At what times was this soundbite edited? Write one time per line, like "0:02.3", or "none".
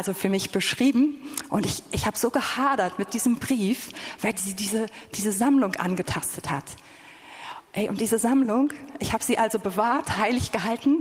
0:05.1